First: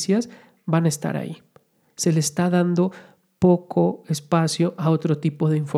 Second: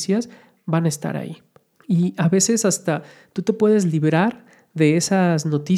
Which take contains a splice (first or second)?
second